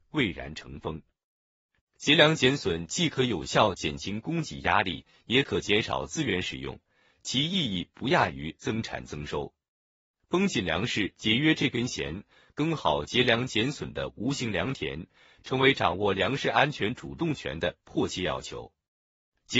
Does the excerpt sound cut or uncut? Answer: cut